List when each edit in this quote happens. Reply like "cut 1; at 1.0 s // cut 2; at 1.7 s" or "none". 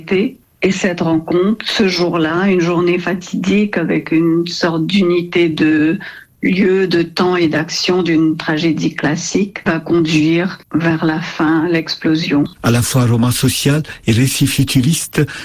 none